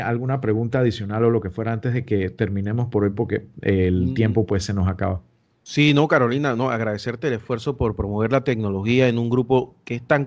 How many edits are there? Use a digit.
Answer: 0